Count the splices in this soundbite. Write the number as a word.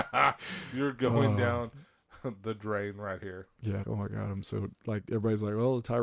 one